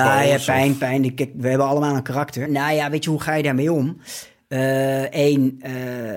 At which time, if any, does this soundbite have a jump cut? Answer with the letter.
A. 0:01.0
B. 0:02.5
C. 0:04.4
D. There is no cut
B